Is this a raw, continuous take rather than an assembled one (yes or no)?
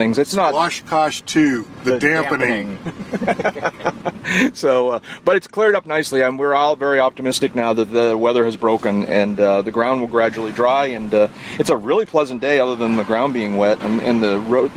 no